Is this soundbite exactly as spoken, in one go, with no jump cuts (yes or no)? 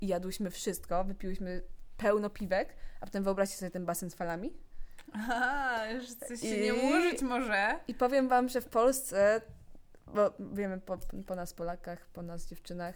yes